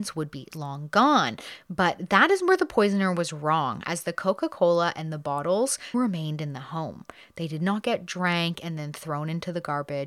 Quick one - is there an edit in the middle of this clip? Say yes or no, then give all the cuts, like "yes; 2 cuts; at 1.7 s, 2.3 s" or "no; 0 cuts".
yes; 1 cut; at 5.9 s